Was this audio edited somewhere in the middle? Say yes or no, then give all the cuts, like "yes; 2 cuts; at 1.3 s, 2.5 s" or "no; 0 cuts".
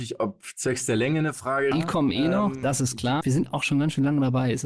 yes; 2 cuts; at 1.7 s, 3.2 s